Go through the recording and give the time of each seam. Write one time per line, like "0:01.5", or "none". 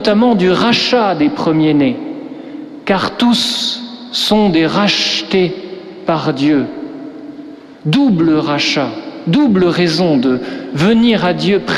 0:07.8

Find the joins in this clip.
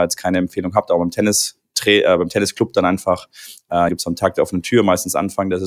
0:03.9

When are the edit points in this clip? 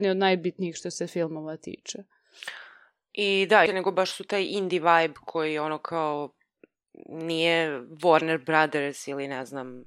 0:03.7

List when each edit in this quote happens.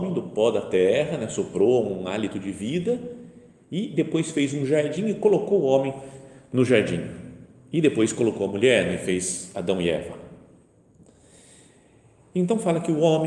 none

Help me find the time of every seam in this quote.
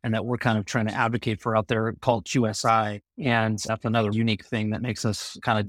0:03.1
0:04.1

